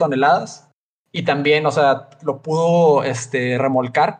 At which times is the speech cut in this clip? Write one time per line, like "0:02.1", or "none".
none